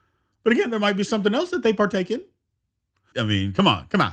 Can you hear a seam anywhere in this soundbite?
yes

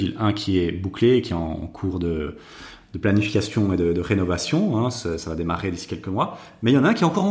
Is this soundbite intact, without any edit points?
yes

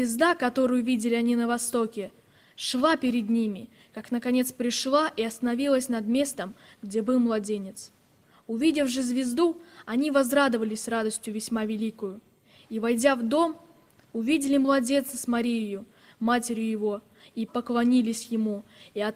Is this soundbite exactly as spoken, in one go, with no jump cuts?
no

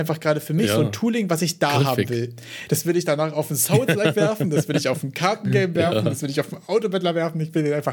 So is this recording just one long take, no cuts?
yes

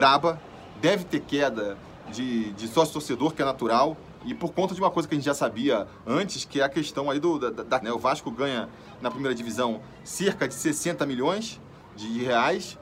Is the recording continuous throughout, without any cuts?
no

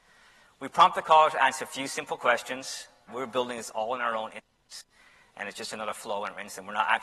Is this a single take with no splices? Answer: no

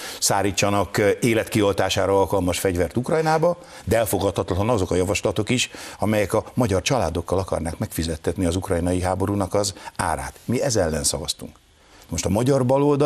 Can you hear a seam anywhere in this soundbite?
no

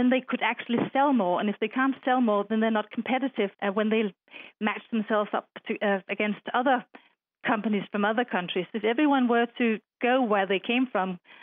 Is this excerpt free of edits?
no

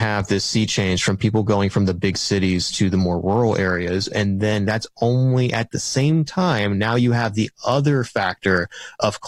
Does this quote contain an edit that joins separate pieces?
no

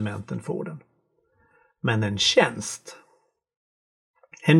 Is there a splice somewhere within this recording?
no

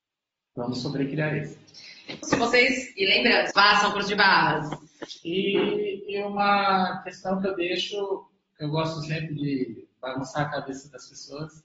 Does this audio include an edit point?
yes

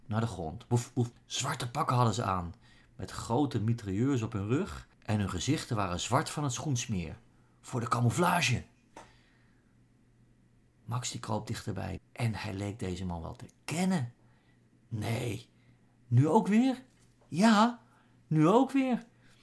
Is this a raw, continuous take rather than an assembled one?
no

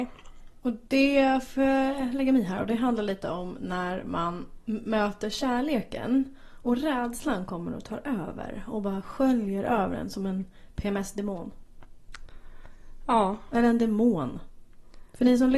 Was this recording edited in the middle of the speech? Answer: no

